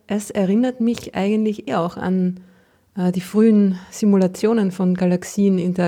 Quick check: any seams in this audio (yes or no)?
yes